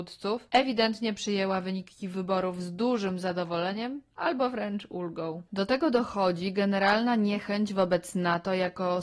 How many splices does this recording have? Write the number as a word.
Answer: one